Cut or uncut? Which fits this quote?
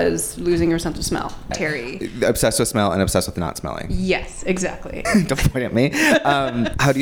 cut